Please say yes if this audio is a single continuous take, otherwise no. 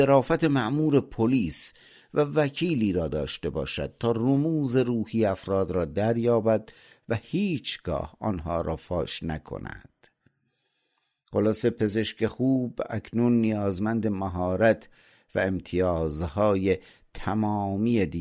yes